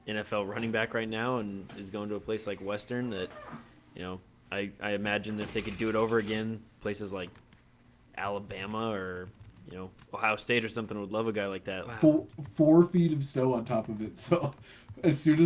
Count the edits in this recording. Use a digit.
1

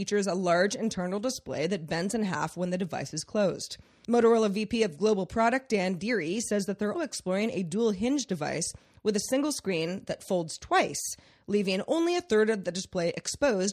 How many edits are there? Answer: 1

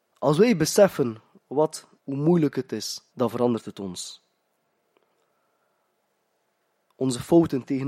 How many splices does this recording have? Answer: 2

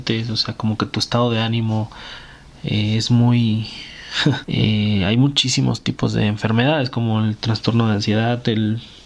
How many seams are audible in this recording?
1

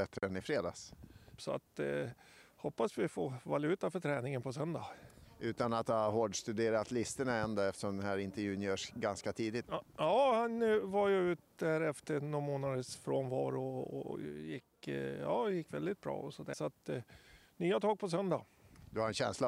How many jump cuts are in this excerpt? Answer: 3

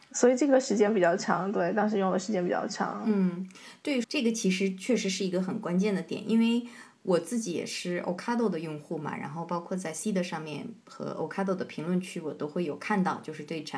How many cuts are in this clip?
1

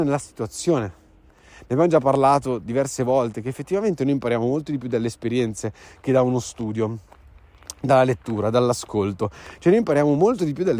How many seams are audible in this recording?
0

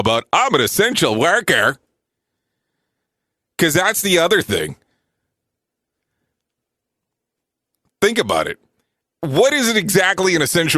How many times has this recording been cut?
0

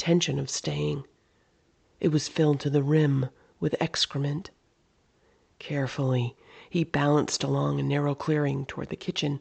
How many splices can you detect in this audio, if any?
1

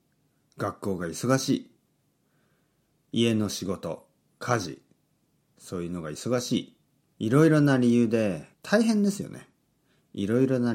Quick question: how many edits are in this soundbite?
3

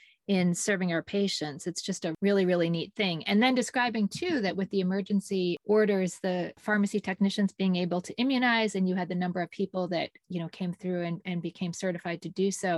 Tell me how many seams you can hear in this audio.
0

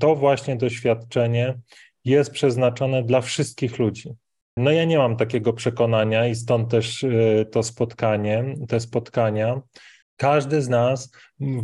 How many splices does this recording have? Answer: 2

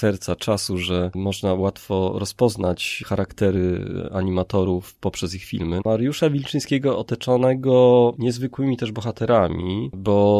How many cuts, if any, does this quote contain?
1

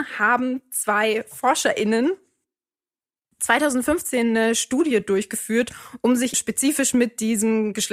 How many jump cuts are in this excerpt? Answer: 1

